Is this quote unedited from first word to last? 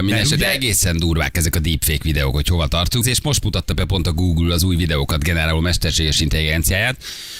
no; 1 cut; at 3.0 s

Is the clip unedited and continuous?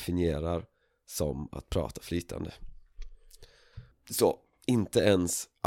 no; 1 cut; at 3.9 s

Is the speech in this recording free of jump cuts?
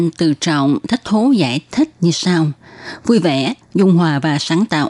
no; 1 cut; at 3.6 s

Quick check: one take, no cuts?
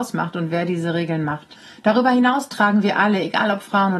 yes; 0 cuts

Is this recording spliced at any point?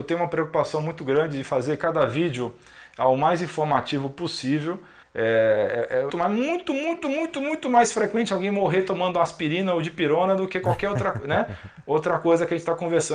yes; 2 cuts; at 5.0 s, 6.1 s

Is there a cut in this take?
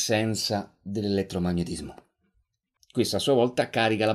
yes; 1 cut; at 2.8 s

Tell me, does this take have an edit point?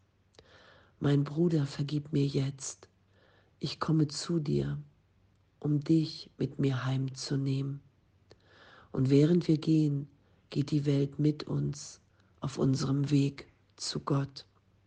no; 0 cuts

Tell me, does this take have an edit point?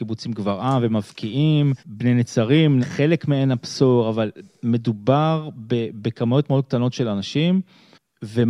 yes; 2 cuts; at 1.8 s, 2.8 s

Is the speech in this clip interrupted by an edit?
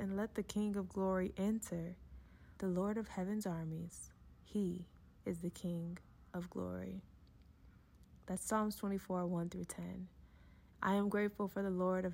yes; 2 cuts; at 2.6 s, 10.7 s

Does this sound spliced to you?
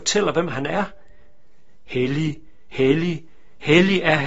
no; 0 cuts

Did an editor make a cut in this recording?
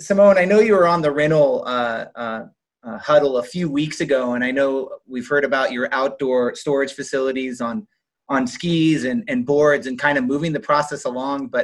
no; 0 cuts

